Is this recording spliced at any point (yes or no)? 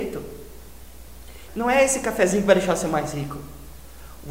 yes